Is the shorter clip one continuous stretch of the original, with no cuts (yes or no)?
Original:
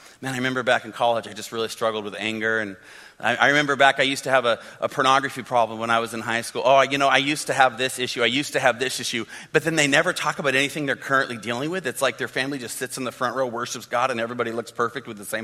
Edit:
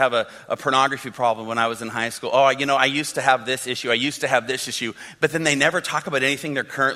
yes